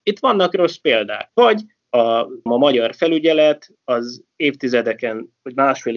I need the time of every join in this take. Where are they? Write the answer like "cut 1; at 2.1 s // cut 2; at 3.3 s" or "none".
cut 1; at 1.3 s // cut 2; at 2.5 s